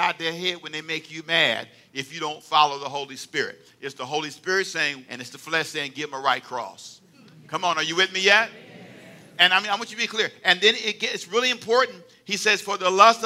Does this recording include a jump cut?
yes; 1 cut; at 5.1 s

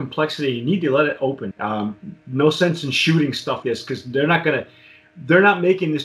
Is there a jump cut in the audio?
yes; 2 cuts; at 1.5 s, 3.6 s

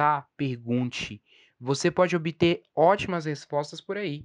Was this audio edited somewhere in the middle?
no; 0 cuts

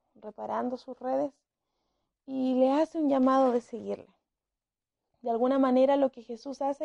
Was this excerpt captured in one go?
no; 1 cut; at 5.1 s

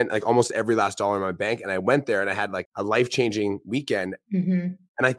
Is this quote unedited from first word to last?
no; 1 cut; at 4.2 s

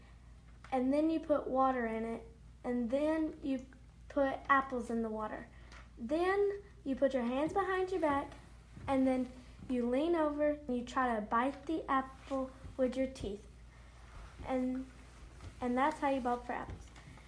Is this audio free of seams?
no; 1 cut; at 10.7 s

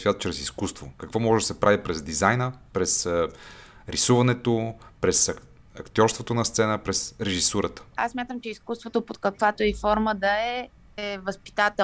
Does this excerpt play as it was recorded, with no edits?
yes; 0 cuts

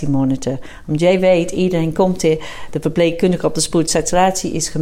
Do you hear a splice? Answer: no; 0 cuts

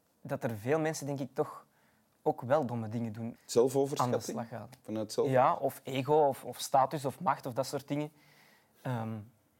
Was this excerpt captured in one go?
no; 1 cut; at 3.4 s

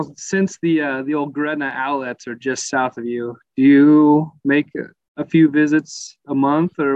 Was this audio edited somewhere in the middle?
no; 0 cuts

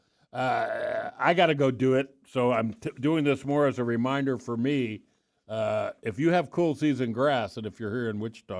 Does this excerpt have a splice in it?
no; 0 cuts

